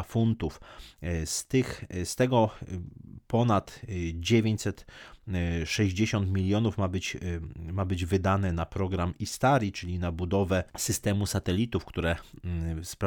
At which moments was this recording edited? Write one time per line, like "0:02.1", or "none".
0:10.7